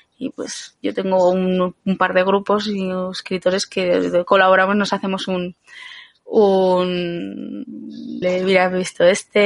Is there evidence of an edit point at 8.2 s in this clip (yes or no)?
yes